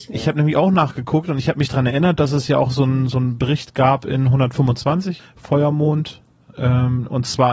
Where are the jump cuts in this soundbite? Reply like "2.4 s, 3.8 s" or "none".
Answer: 5.2 s